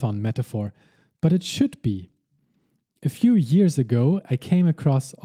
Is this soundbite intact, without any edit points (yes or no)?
yes